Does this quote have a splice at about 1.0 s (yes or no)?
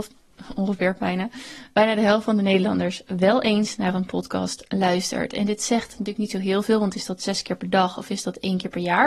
no